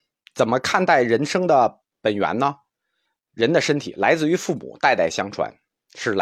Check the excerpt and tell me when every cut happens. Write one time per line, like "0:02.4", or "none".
none